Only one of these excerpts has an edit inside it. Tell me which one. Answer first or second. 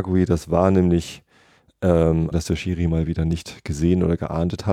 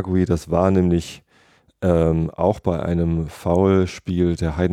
first